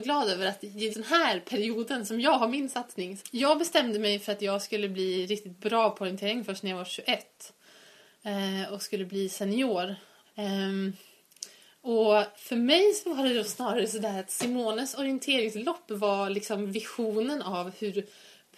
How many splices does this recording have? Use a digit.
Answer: 3